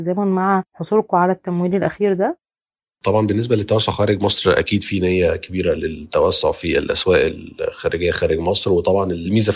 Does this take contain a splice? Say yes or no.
no